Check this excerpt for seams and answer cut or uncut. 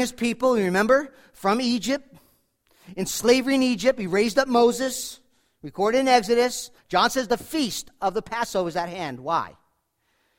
cut